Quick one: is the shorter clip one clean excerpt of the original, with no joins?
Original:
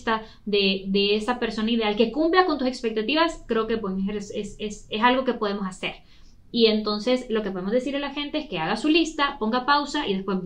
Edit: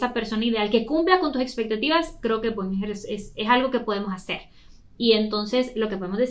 no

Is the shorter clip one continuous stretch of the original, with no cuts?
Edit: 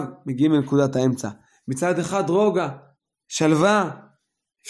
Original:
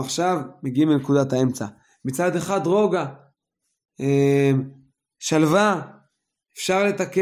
no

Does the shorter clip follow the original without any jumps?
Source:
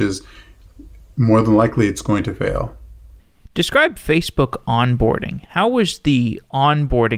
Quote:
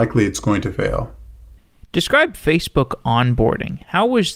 yes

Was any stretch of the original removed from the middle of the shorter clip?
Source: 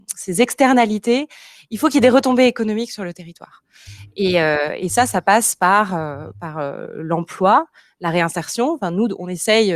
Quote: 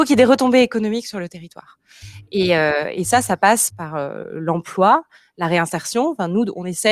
yes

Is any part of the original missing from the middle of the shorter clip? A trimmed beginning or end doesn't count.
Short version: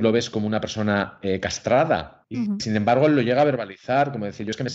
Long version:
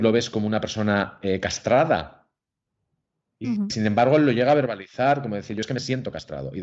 yes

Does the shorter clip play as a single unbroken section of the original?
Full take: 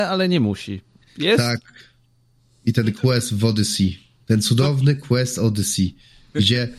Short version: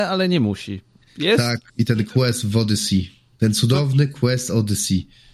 no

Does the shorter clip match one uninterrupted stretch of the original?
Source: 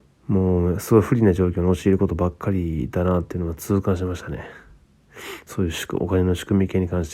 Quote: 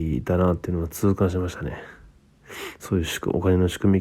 yes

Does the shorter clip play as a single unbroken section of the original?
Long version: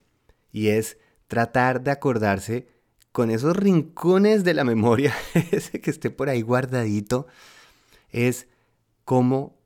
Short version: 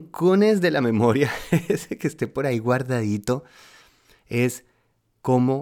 yes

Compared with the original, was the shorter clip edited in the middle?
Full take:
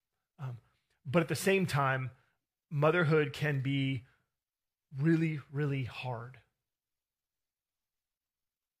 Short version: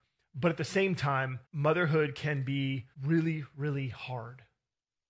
yes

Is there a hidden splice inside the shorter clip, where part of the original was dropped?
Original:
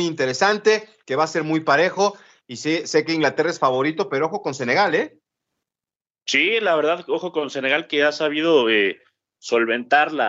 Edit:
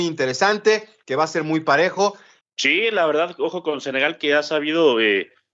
yes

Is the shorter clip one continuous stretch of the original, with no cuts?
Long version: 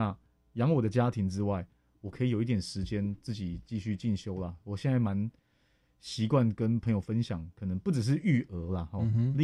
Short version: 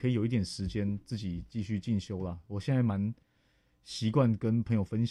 yes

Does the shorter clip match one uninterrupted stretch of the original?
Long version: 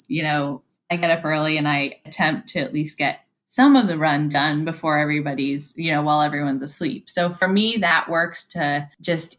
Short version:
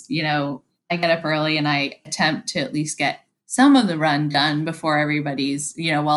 yes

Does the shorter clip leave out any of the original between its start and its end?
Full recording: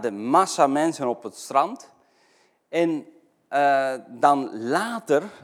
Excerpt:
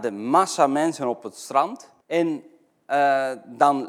yes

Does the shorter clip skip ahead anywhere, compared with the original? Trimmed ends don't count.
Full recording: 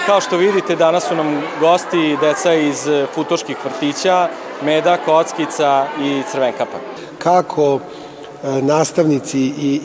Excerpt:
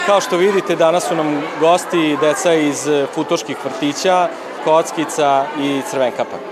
yes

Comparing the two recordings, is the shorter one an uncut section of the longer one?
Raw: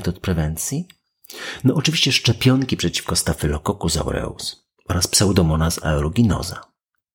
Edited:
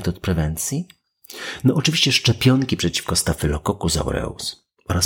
yes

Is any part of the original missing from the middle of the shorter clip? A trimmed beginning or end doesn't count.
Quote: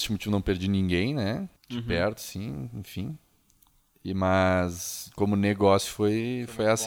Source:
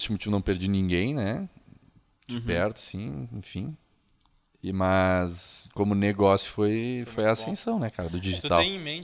yes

